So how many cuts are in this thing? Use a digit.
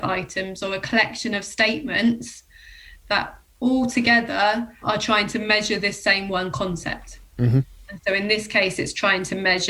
1